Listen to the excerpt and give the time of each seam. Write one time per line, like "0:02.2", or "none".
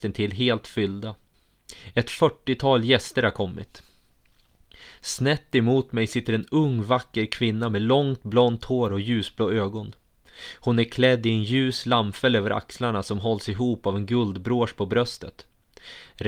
none